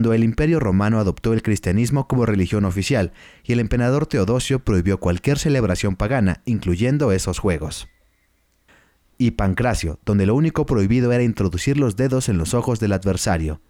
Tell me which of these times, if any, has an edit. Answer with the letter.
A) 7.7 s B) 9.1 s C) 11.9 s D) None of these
B